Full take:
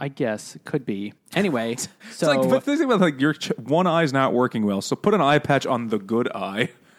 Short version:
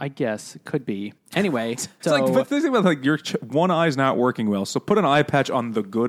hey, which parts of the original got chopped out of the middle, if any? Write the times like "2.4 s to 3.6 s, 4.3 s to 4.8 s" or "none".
2.0 s to 2.2 s